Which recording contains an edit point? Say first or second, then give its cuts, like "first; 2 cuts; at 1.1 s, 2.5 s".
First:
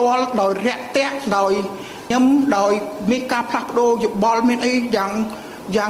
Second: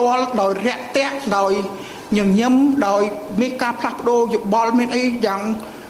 first; 1 cut; at 2.1 s